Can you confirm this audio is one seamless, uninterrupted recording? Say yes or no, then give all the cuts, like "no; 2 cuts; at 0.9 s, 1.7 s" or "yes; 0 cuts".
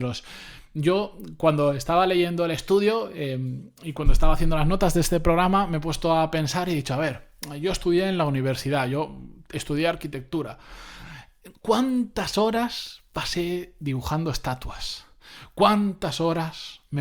yes; 0 cuts